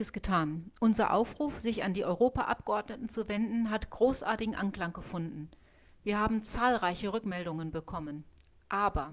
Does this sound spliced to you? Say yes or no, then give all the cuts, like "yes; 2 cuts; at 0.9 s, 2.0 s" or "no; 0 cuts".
no; 0 cuts